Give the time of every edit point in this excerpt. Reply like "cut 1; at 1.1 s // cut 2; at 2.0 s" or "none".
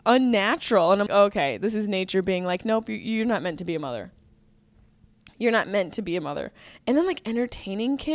cut 1; at 1.1 s

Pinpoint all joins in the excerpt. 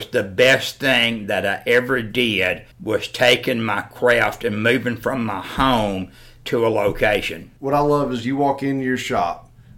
cut 1; at 2.7 s

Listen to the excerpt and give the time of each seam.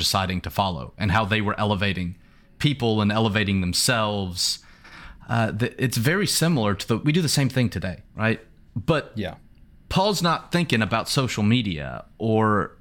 cut 1; at 7.0 s // cut 2; at 8.1 s

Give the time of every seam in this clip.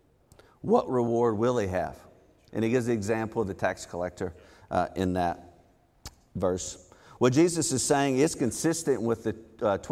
none

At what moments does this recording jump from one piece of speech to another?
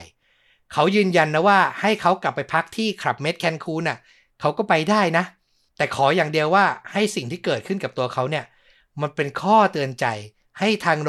none

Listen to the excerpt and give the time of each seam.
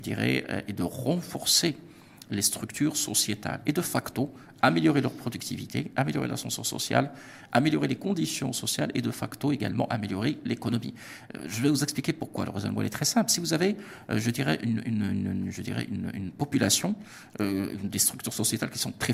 none

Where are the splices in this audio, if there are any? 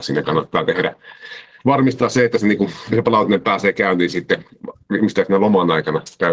cut 1; at 2.9 s

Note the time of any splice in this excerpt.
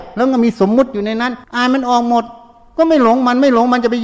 cut 1; at 1.4 s

